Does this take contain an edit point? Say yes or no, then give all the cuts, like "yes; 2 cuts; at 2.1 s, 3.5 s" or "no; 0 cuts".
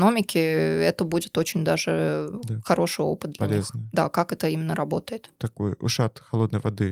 yes; 1 cut; at 5.3 s